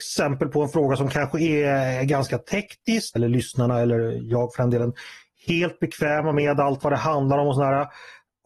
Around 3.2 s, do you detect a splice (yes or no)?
yes